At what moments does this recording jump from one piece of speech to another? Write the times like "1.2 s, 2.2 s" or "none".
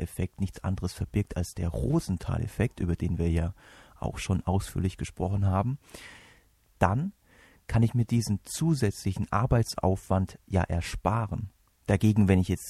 11.7 s